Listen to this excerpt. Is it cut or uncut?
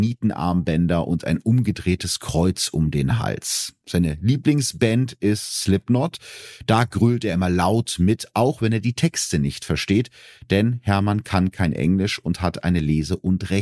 uncut